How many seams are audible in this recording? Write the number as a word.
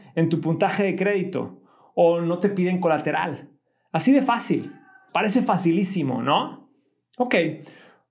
one